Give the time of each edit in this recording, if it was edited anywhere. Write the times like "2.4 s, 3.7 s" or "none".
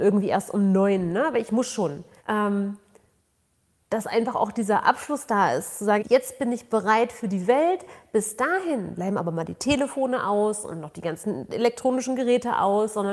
2.2 s, 6.0 s